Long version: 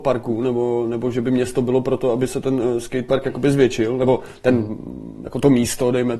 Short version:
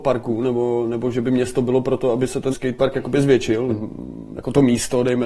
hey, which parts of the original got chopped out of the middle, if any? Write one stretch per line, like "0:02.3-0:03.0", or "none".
0:02.5-0:02.8
0:04.0-0:04.6